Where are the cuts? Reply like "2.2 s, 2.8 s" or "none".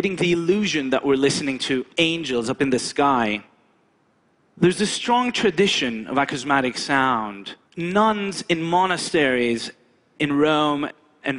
4.5 s, 7.6 s